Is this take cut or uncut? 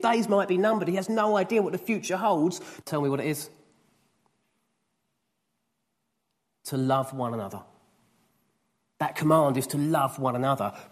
cut